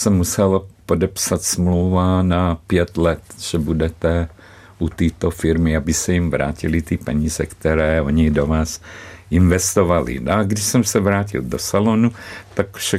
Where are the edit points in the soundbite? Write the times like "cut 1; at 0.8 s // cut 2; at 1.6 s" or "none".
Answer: none